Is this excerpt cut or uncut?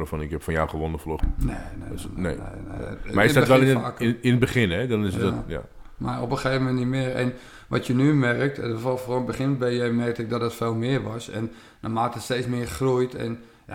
cut